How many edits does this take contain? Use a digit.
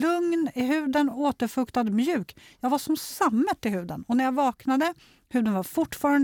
0